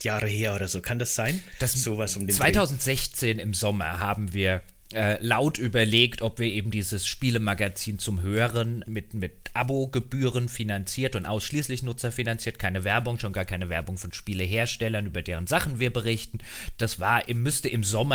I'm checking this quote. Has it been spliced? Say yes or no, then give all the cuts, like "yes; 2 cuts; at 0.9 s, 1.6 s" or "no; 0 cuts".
yes; 1 cut; at 8.8 s